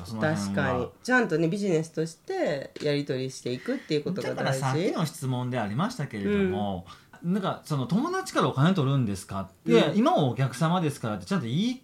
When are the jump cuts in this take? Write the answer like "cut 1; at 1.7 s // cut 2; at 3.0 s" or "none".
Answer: cut 1; at 9.7 s